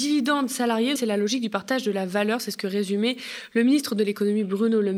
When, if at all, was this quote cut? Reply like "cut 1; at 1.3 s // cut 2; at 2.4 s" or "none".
cut 1; at 1.0 s